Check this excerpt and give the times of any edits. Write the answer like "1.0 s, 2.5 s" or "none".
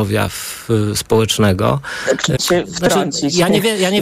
2.4 s